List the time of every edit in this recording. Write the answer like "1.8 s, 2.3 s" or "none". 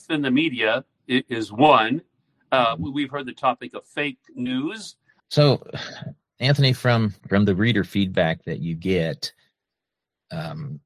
5.2 s, 7.2 s